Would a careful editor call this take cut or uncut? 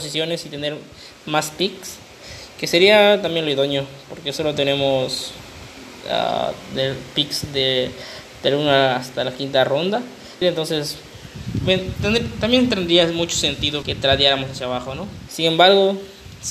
cut